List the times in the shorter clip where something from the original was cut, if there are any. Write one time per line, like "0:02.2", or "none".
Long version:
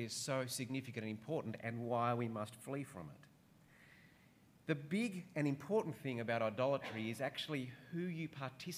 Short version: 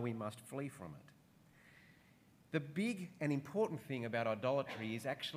none